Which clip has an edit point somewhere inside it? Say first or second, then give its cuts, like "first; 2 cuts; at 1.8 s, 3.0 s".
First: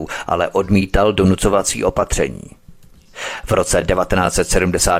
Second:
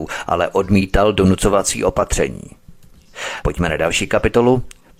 second; 1 cut; at 3.4 s